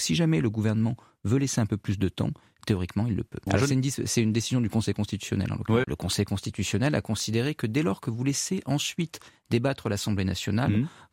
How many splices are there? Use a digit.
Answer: 2